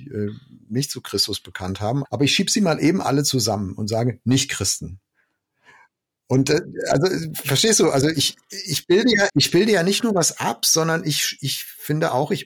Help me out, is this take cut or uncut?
cut